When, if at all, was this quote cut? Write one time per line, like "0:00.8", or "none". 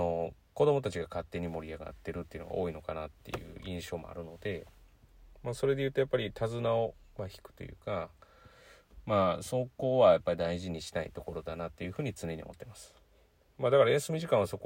none